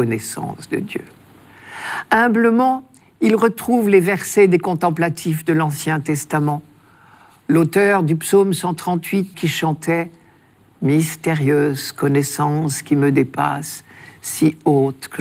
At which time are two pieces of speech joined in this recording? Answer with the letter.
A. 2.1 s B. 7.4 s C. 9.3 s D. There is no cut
C